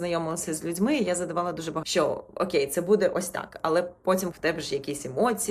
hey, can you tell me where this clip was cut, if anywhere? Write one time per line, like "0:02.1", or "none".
0:01.8
0:04.3